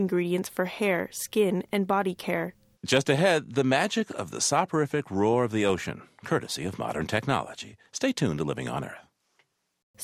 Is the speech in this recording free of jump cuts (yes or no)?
no